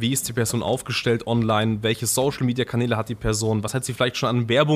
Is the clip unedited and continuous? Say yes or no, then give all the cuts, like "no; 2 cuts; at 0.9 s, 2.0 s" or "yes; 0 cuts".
yes; 0 cuts